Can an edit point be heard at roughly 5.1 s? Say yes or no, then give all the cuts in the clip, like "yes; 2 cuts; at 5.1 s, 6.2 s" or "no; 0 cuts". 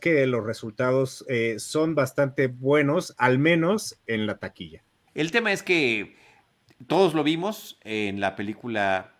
yes; 1 cut; at 5.1 s